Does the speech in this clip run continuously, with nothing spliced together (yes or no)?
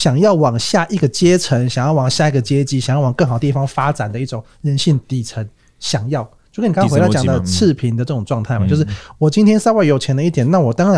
yes